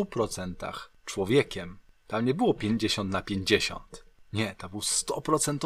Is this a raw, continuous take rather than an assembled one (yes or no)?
yes